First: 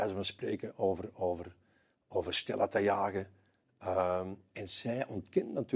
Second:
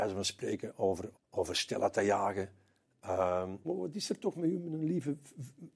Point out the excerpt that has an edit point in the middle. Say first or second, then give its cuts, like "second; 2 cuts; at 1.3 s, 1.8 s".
second; 2 cuts; at 1.1 s, 3.6 s